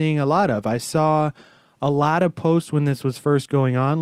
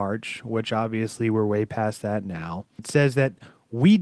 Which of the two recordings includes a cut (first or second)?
second